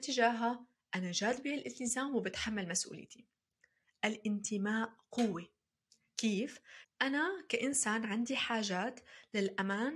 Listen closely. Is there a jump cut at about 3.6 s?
no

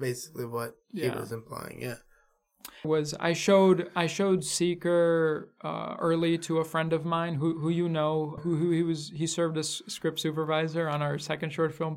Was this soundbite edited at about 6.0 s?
no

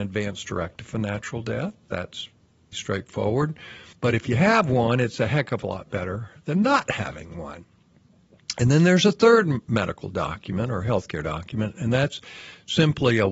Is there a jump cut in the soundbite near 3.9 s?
yes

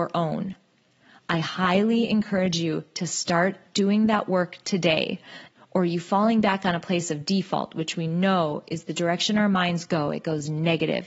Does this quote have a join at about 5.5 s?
yes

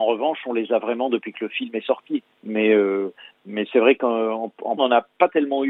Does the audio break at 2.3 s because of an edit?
yes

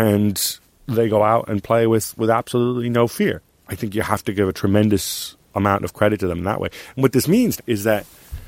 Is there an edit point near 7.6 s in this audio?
yes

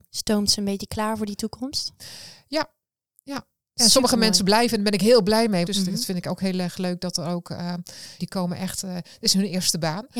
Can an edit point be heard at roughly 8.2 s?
yes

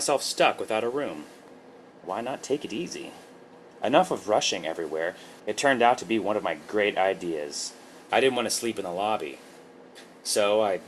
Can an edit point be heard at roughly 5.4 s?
yes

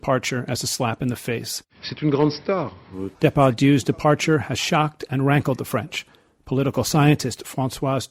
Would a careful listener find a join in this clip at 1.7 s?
no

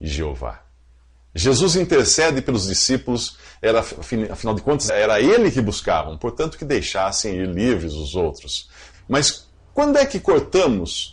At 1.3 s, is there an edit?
no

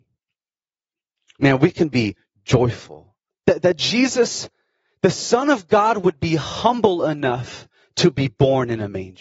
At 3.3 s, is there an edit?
yes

